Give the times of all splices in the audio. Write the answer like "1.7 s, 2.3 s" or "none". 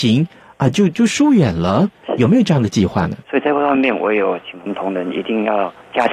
3.2 s